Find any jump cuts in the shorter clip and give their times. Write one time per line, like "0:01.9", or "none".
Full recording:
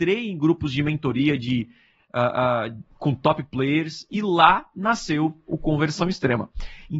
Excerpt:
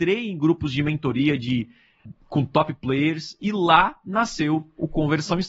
0:02.1